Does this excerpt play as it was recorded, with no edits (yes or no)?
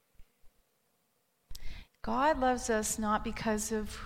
no